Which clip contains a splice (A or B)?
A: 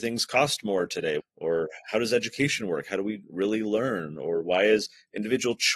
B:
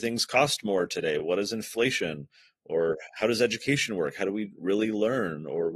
A